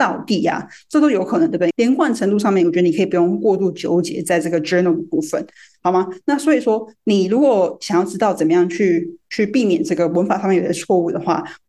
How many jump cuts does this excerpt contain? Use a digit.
1